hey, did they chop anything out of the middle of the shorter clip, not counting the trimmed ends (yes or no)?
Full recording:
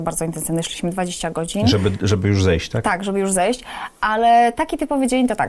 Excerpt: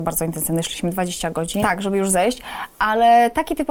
yes